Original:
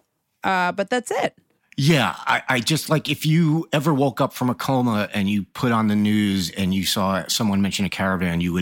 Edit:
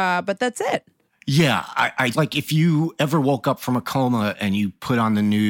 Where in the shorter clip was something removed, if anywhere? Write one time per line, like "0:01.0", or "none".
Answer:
0:02.1